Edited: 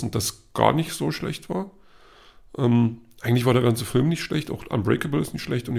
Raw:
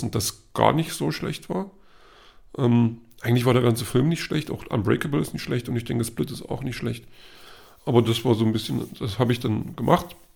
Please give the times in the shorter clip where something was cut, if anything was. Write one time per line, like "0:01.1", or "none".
none